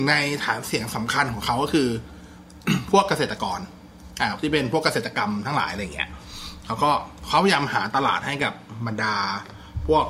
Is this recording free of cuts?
yes; 0 cuts

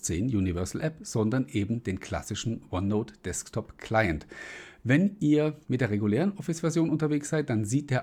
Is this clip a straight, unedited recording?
yes; 0 cuts

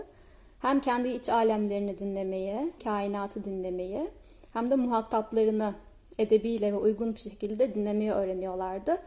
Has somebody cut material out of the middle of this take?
yes; 1 cut; at 2.8 s

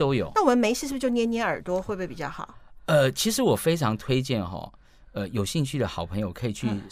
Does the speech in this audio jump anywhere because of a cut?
no; 0 cuts

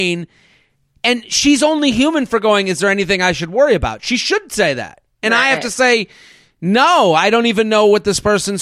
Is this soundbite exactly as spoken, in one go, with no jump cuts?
yes; 0 cuts

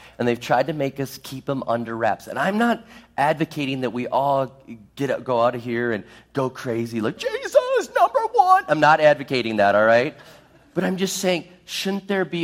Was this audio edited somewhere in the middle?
yes; 1 cut; at 7.2 s

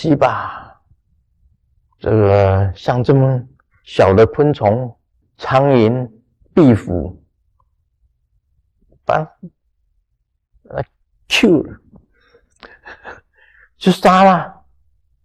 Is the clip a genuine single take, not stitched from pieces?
no; 1 cut; at 5.2 s

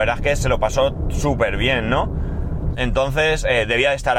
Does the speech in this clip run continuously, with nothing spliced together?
no; 1 cut; at 2.7 s

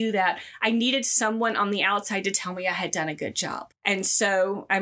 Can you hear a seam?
yes; 1 cut; at 3.7 s

